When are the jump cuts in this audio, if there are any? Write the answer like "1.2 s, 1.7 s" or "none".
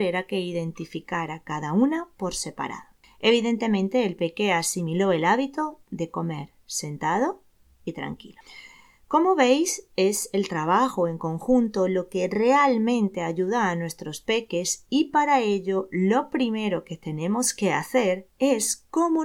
none

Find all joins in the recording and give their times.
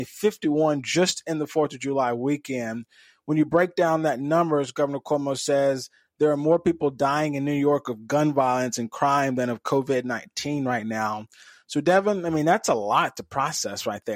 none

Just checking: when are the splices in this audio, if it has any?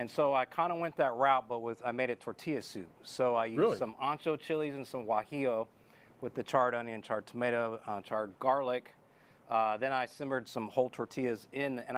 none

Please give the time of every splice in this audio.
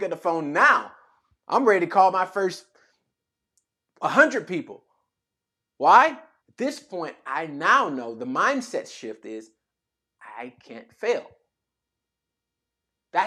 6.4 s

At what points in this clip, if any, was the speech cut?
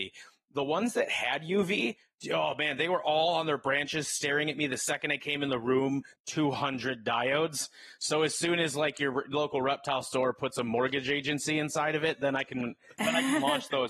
6.2 s

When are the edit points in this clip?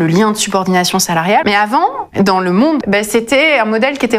1.4 s, 2.8 s

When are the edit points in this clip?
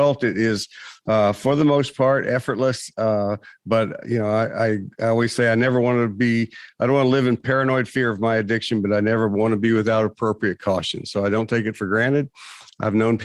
none

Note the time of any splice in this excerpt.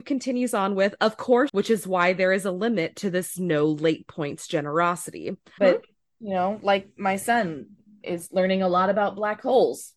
1.5 s, 5.6 s

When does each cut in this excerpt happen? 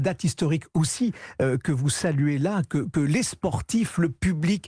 none

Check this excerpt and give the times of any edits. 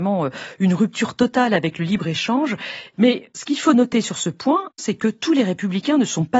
2.9 s, 4.8 s

